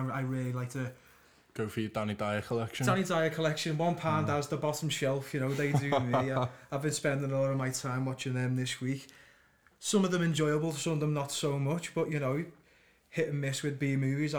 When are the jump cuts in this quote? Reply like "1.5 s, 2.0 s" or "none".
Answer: none